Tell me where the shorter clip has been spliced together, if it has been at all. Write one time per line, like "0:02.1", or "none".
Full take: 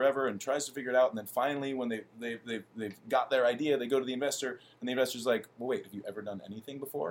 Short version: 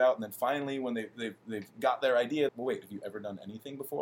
0:01.1
0:02.5